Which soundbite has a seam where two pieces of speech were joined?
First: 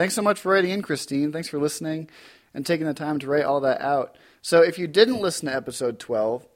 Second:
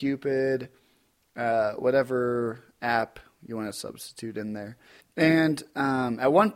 second; 1 cut; at 5.0 s

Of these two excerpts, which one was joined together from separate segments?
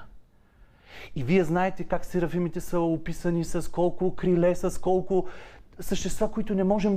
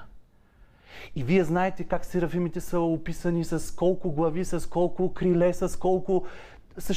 first; 1 cut; at 3.5 s

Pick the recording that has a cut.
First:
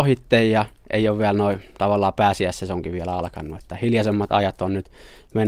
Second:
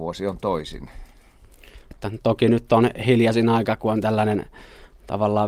second; 1 cut; at 1.9 s

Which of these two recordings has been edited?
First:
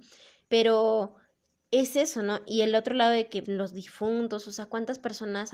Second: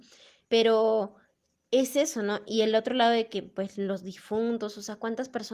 first; 1 cut; at 3.4 s

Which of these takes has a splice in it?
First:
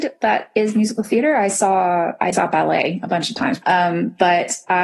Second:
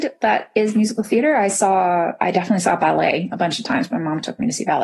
first; 2 cuts; at 2.3 s, 3.6 s

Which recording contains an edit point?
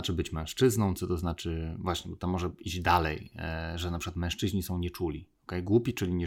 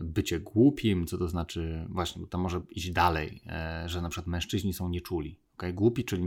first; 1 cut; at 1.0 s

